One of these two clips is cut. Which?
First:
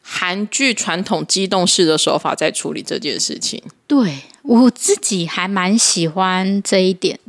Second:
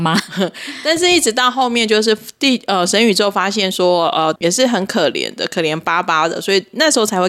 second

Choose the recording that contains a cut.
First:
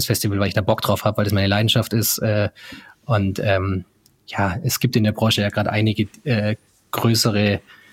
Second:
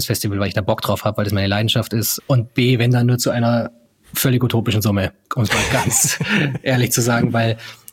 second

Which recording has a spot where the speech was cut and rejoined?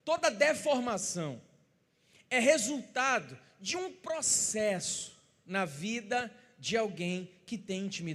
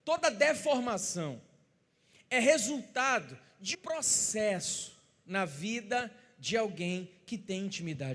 second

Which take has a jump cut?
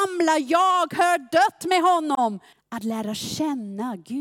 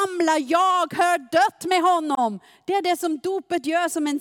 first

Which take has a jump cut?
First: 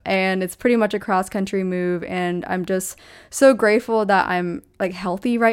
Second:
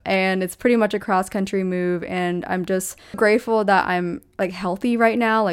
second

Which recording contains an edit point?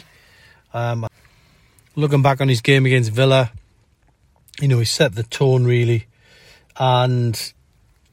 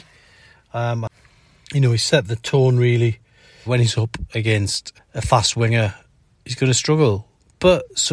second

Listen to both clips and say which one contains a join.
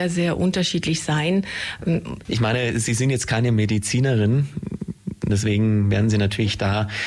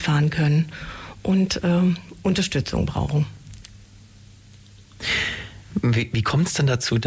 first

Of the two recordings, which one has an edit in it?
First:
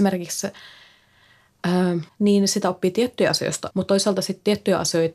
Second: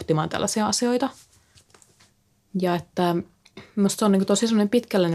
first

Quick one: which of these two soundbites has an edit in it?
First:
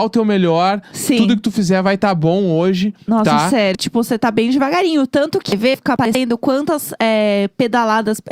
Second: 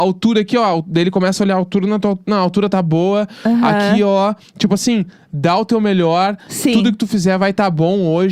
first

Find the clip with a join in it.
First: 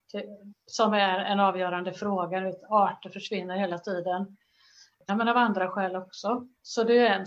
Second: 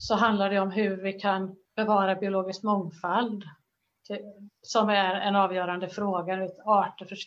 first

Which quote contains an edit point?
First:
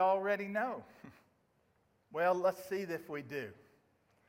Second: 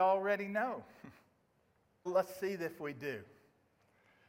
second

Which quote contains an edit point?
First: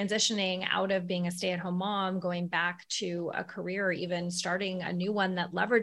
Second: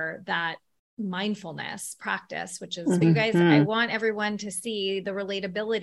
second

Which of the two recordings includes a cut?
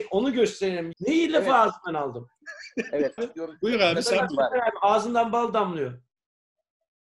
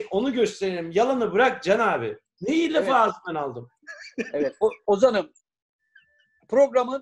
first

